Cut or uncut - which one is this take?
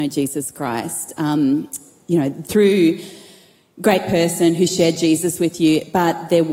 uncut